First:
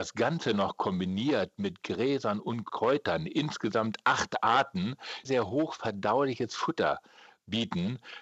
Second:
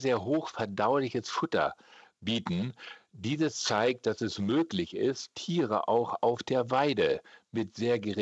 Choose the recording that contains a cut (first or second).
first